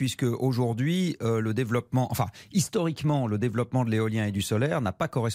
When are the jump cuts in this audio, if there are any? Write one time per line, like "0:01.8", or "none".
none